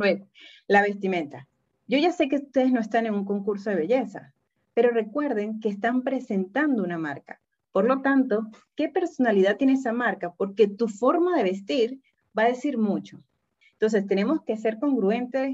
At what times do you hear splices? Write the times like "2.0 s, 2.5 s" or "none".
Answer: 13.6 s